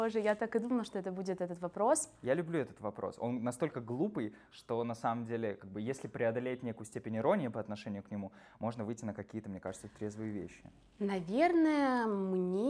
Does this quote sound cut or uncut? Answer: uncut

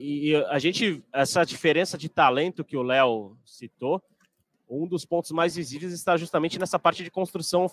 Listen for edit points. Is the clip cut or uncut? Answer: uncut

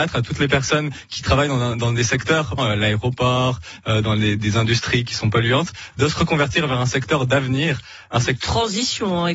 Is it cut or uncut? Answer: cut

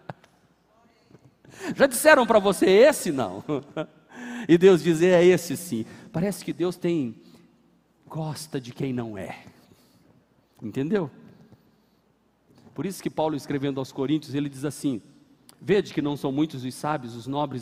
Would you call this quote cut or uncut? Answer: uncut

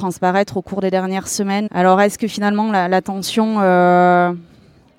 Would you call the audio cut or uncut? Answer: cut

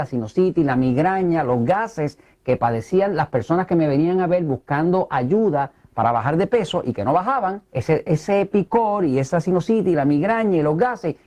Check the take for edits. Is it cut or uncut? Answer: cut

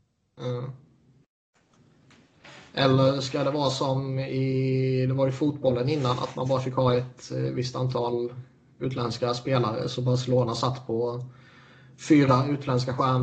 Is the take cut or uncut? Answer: uncut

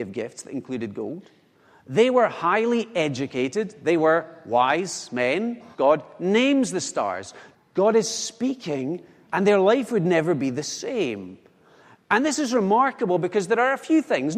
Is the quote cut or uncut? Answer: cut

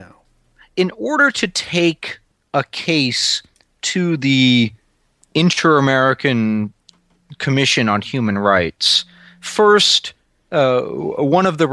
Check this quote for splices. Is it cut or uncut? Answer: uncut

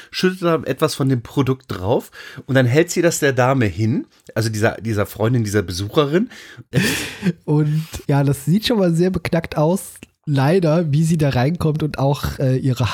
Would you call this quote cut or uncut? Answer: cut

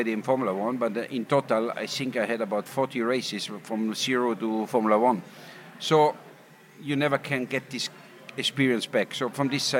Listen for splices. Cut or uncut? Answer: uncut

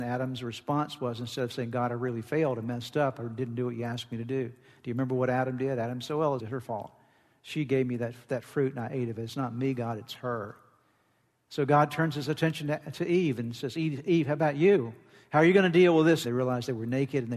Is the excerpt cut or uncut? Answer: cut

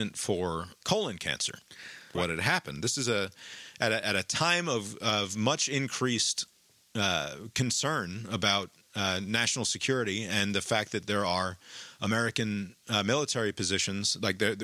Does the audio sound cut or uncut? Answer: cut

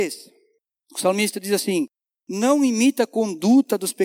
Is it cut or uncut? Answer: cut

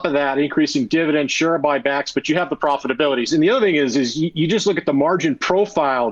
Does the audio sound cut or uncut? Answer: cut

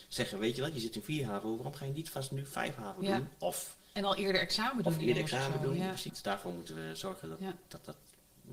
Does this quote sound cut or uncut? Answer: cut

